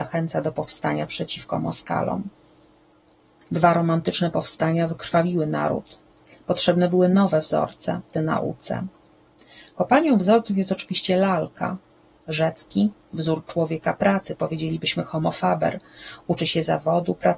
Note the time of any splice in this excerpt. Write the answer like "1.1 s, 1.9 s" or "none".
3.4 s, 8.1 s, 12.2 s